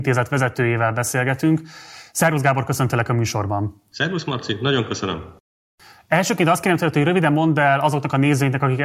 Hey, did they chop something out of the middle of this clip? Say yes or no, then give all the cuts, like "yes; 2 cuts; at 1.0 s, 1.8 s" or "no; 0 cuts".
no; 0 cuts